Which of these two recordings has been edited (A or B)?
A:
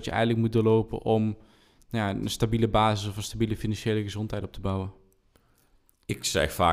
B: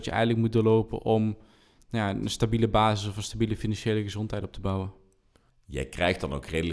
B